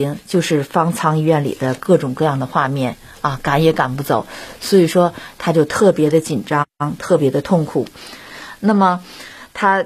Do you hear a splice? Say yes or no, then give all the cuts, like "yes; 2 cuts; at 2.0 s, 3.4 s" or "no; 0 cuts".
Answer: no; 0 cuts